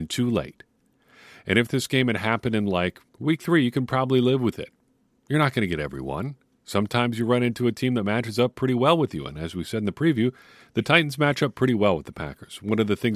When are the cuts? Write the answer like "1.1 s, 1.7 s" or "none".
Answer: 3.1 s